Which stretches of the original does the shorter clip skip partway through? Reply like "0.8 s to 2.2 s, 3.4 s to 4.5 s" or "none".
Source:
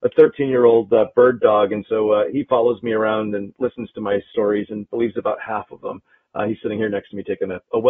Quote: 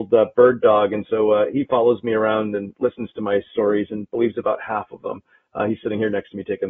none